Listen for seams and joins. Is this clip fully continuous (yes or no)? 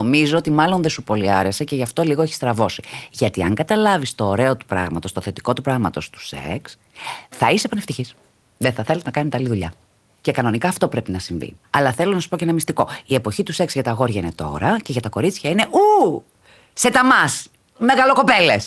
yes